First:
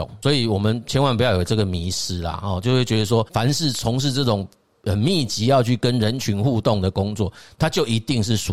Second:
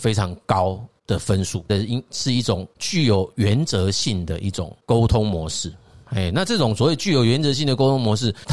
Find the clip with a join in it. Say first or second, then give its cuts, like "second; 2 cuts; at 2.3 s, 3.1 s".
second; 1 cut; at 1.7 s